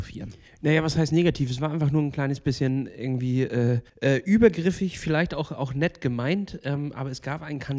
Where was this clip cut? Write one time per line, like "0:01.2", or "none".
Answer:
0:03.9

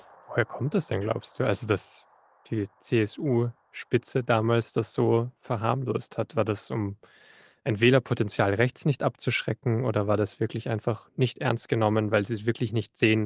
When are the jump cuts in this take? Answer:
none

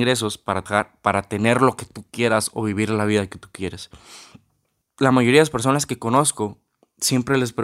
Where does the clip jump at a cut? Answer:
0:04.9

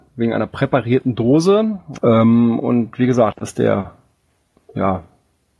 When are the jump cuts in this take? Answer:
0:02.0
0:03.3

